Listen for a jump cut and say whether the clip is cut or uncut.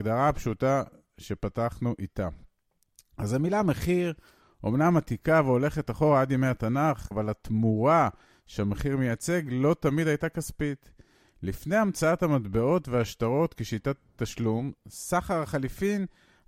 cut